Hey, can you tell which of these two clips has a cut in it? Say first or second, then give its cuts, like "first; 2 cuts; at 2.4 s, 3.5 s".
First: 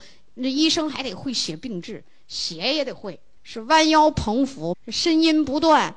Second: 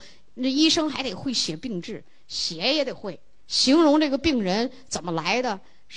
first; 2 cuts; at 3.4 s, 4.7 s